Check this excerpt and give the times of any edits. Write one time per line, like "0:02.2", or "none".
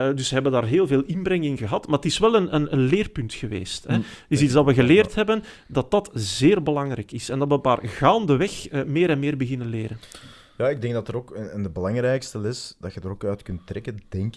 none